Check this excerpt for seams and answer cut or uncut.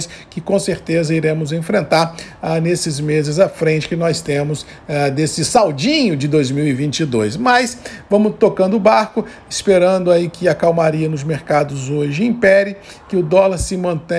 uncut